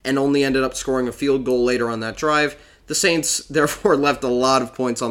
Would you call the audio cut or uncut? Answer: uncut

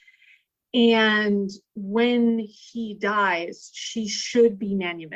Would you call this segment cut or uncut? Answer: uncut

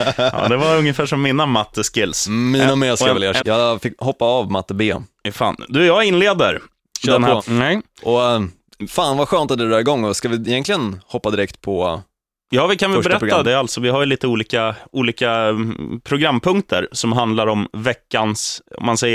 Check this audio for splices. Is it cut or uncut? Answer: cut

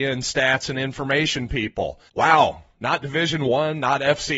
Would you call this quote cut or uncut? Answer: cut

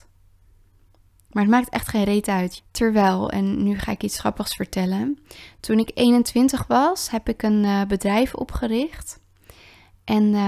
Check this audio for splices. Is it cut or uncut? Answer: cut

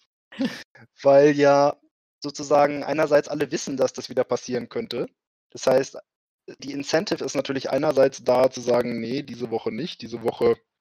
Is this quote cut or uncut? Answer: cut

